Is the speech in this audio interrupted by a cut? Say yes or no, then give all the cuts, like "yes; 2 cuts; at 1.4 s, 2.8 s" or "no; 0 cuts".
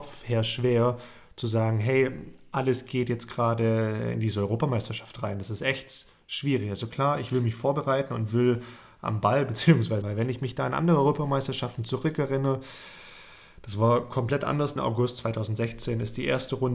yes; 2 cuts; at 10.0 s, 14.8 s